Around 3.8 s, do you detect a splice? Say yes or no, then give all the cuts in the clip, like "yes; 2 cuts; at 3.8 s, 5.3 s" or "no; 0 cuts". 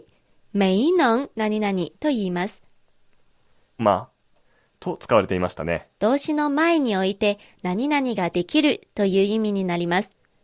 yes; 2 cuts; at 3.8 s, 6.0 s